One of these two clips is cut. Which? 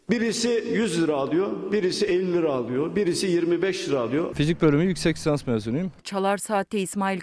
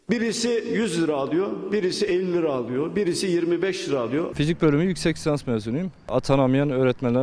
first; 1 cut; at 6.0 s

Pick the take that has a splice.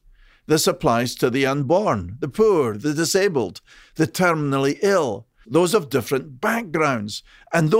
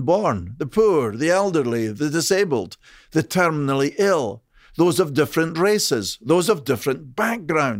first; 2 cuts; at 2.7 s, 5.4 s

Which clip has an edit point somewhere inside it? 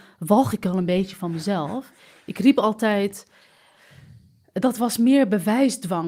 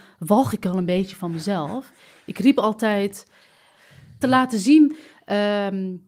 second; 1 cut; at 4.2 s

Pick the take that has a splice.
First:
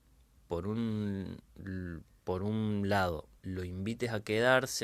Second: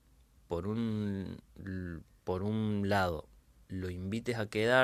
first; 1 cut; at 3.4 s

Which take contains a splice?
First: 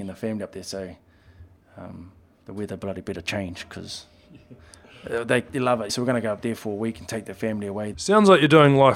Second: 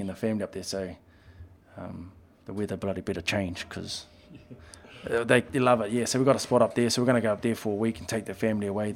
first; 2 cuts; at 5.9 s, 7.9 s

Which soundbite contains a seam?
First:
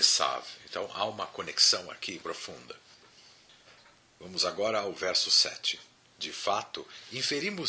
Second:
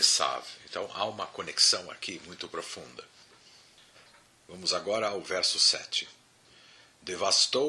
first; 2 cuts; at 2.2 s, 6.0 s

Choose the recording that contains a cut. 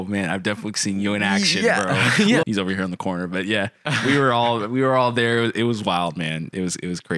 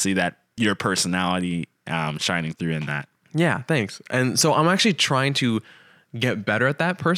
first; 1 cut; at 2.4 s

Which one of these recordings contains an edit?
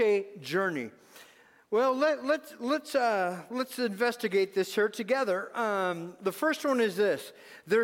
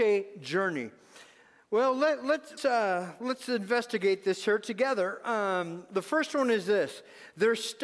second; 1 cut; at 2.6 s

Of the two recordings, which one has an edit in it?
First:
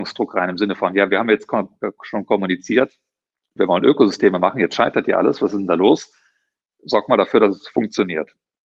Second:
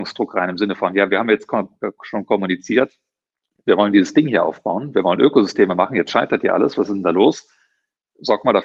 first; 1 cut; at 3.6 s

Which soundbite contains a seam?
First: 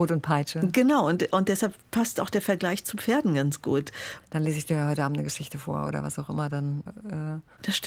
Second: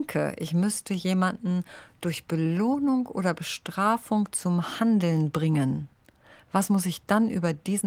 first; 2 cuts; at 4.2 s, 6.9 s

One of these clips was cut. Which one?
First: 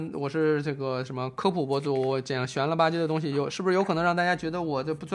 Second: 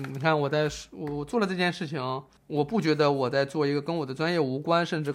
second; 1 cut; at 2.4 s

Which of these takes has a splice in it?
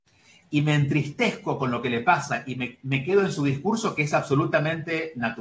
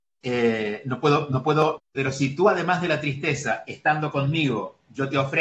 second; 1 cut; at 1.8 s

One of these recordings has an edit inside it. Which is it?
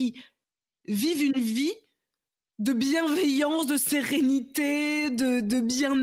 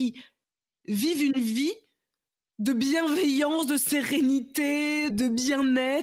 second; 1 cut; at 5.1 s

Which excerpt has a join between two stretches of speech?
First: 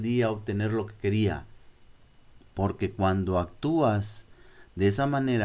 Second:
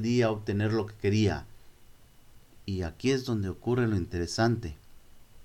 first; 1 cut; at 2.4 s

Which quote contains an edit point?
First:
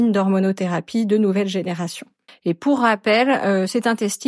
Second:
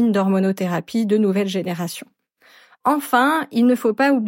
first; 1 cut; at 2.3 s

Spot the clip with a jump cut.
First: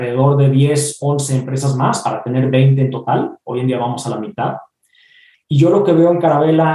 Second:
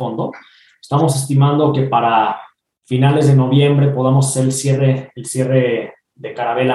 first; 1 cut; at 5.3 s

